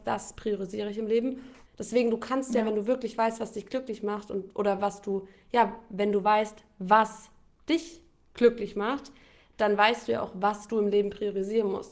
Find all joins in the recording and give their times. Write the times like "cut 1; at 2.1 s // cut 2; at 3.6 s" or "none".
cut 1; at 1.7 s